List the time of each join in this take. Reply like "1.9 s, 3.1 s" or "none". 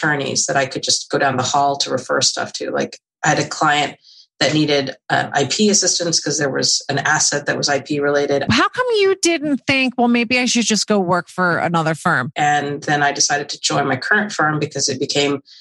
8.5 s, 12.3 s